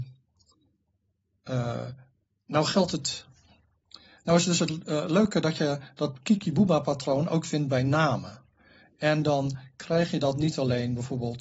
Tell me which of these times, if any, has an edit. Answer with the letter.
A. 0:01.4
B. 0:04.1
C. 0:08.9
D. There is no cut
D